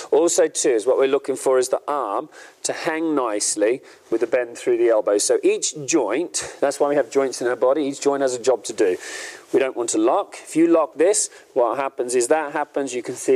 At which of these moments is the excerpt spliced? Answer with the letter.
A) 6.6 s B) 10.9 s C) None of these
B